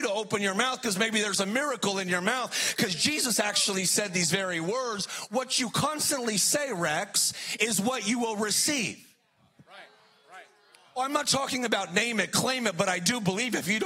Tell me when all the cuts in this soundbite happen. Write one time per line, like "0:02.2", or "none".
none